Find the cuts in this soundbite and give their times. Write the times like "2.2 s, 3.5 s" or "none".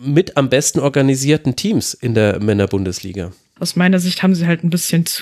3.6 s